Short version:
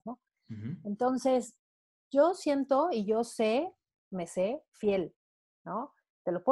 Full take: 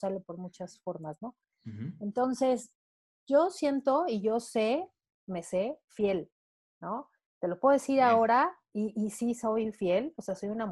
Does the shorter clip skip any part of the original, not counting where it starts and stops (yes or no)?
no